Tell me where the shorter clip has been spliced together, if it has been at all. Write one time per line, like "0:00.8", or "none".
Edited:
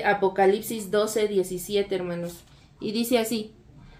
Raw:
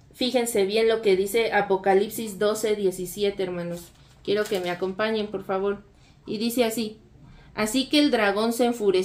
0:02.6